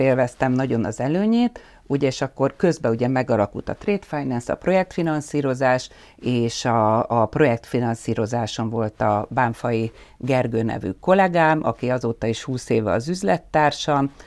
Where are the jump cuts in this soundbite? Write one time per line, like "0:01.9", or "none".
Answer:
none